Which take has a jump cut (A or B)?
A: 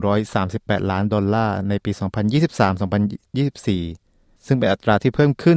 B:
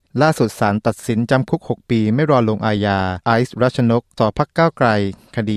B